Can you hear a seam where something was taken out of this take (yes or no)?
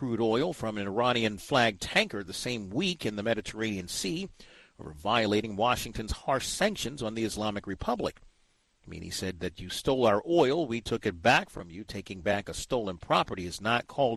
no